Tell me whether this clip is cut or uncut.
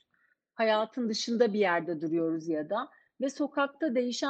uncut